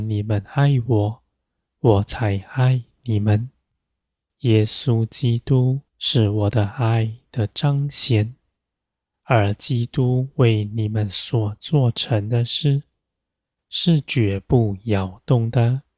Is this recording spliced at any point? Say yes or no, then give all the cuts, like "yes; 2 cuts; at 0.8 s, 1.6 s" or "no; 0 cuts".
yes; 1 cut; at 5.9 s